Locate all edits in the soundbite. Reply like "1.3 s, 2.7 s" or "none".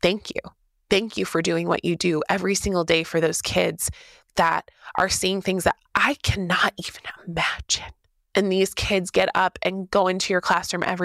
5.8 s